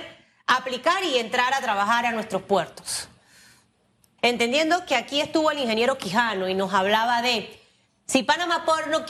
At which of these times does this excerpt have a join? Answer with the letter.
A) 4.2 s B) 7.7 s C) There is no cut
A